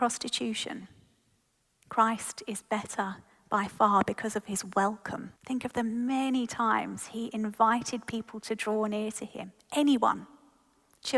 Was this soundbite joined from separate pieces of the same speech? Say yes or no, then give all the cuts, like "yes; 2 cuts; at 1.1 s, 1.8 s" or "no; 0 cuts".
yes; 2 cuts; at 1.8 s, 5.4 s